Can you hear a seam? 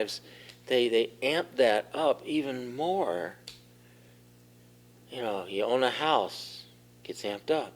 no; 0 cuts

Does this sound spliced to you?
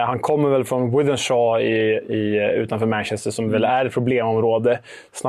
yes; 1 cut; at 2.0 s

